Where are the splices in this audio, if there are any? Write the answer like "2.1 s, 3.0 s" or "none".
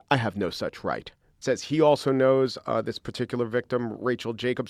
1.4 s

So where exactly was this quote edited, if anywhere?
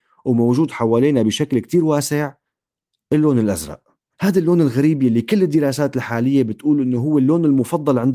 none

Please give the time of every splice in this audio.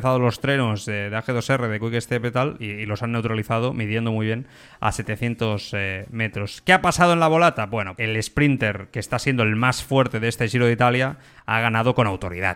8.0 s

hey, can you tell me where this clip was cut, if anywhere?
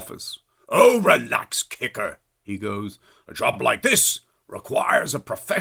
none

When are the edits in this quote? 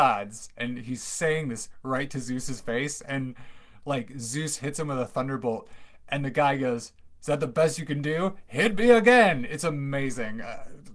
none

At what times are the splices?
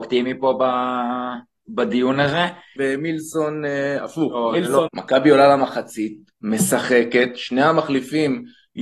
2.8 s, 4.9 s

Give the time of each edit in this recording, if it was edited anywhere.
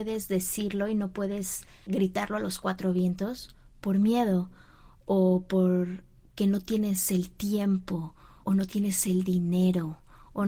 1.9 s, 8.4 s

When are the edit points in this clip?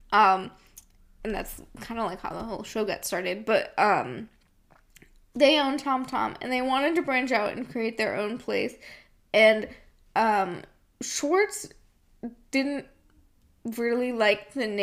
none

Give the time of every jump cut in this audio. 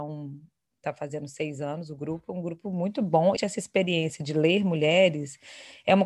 3.4 s

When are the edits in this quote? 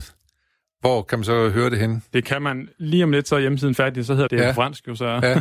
4.3 s

